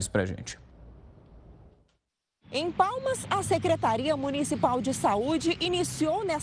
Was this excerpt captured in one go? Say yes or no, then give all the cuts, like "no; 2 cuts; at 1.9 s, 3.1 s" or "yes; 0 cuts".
yes; 0 cuts